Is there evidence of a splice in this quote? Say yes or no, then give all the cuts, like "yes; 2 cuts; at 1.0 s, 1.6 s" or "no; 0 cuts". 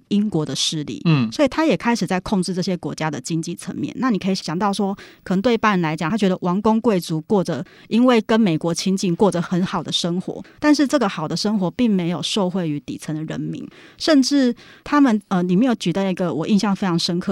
no; 0 cuts